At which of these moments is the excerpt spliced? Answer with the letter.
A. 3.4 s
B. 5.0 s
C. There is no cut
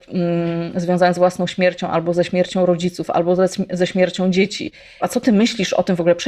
B